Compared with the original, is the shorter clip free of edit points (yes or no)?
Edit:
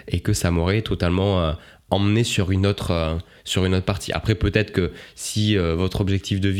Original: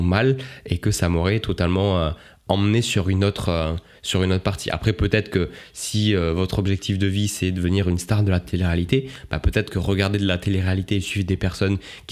yes